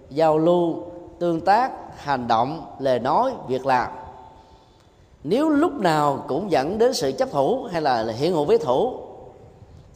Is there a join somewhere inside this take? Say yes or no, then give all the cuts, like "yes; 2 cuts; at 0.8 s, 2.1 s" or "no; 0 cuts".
no; 0 cuts